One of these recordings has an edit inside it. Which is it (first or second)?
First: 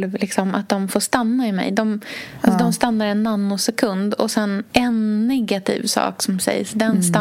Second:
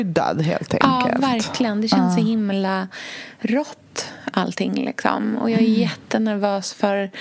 first